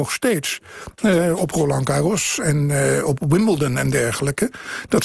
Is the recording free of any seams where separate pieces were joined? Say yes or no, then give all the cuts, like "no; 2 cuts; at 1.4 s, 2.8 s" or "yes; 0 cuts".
yes; 0 cuts